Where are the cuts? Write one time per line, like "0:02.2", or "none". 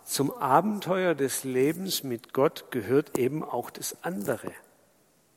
none